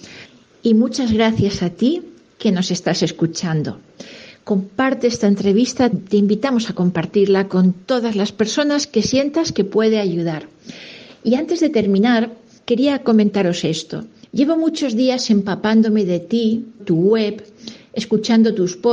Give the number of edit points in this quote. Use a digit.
3